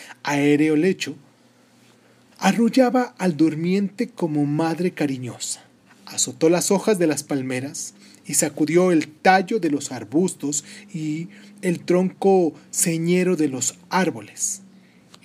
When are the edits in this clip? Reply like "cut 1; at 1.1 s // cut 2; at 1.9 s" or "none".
cut 1; at 5.9 s